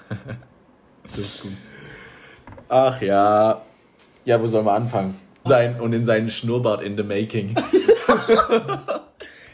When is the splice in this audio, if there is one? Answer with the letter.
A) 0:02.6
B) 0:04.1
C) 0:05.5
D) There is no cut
C